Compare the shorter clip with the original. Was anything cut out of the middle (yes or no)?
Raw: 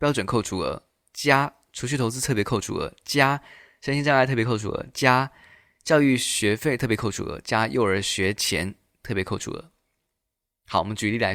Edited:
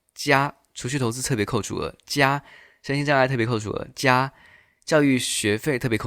no